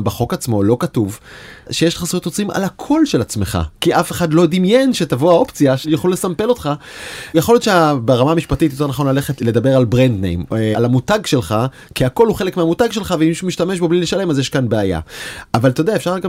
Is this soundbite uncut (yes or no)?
yes